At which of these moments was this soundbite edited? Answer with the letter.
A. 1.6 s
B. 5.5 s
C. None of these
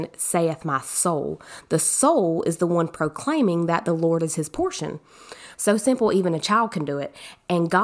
B